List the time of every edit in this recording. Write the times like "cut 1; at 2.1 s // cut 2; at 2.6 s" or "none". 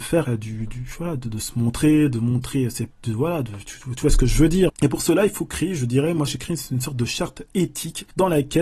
cut 1; at 4.7 s // cut 2; at 6.3 s